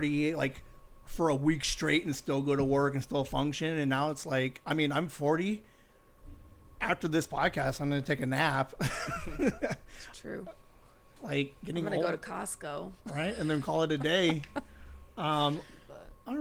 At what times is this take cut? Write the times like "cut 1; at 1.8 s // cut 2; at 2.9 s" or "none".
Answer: cut 1; at 13.0 s